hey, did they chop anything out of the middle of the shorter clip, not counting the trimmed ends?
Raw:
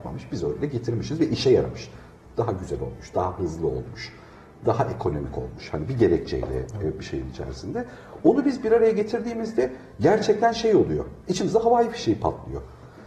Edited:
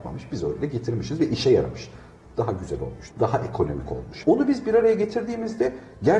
yes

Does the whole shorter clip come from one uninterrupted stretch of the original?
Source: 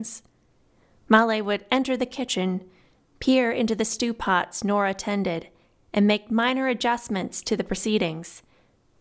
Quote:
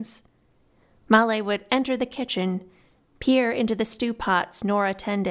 yes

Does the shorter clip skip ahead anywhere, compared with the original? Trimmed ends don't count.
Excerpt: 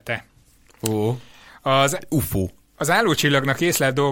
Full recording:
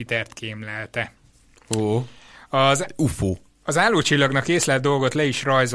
no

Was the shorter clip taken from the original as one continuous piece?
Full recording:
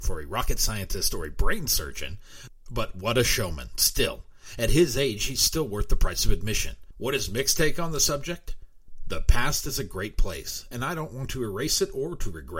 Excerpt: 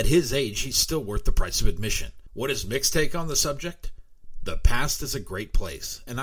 yes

